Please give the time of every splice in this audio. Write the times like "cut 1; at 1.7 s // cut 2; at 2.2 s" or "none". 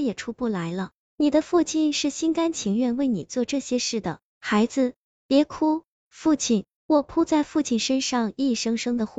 cut 1; at 6.8 s